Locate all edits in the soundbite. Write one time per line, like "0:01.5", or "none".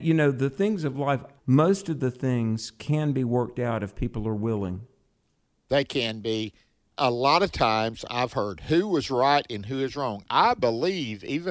0:01.4